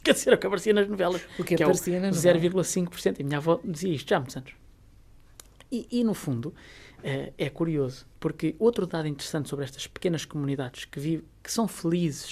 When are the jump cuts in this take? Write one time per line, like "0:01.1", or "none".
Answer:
0:08.1